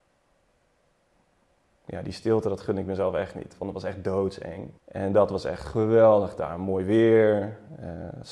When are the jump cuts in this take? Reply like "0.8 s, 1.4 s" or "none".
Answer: 4.8 s